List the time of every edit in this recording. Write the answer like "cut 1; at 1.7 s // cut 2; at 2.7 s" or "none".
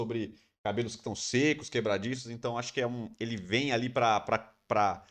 none